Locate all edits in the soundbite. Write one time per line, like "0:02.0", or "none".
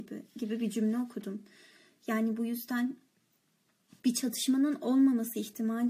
none